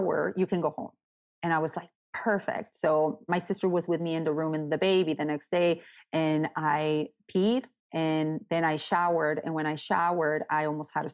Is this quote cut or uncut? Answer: uncut